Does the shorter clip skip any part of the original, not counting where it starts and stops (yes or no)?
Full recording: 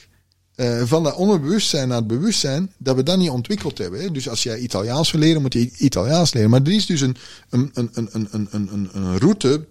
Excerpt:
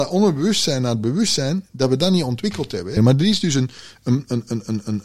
yes